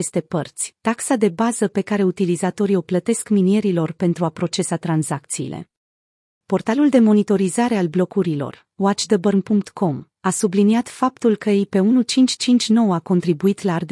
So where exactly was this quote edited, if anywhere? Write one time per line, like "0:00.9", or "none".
0:06.4